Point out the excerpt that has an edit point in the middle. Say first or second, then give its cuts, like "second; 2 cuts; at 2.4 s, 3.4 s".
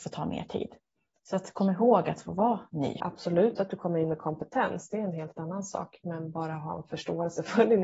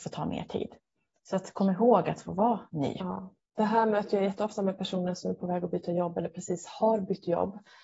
first; 1 cut; at 3.0 s